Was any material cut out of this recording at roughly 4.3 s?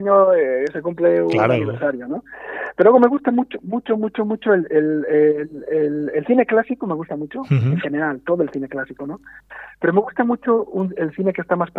no; 0 cuts

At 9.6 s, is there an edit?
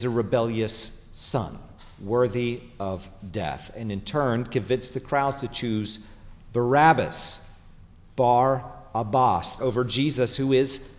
yes; 1 cut; at 9.6 s

